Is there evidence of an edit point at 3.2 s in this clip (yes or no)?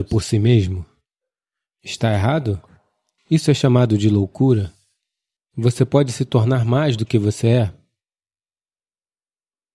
yes